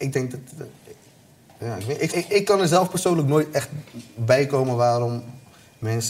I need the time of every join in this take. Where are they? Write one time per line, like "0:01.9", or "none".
0:02.1